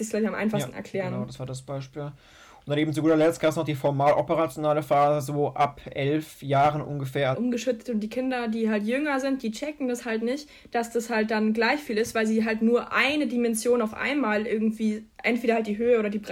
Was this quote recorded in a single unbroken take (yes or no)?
no